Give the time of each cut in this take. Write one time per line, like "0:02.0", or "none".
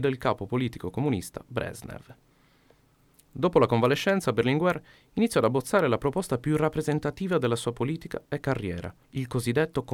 0:09.0